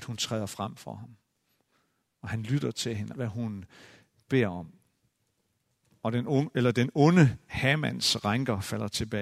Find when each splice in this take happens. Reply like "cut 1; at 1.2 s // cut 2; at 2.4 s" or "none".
cut 1; at 3.1 s